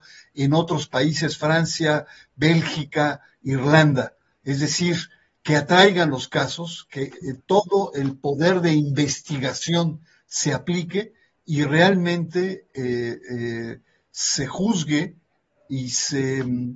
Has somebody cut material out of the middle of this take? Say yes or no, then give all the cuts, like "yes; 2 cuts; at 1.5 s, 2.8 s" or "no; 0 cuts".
no; 0 cuts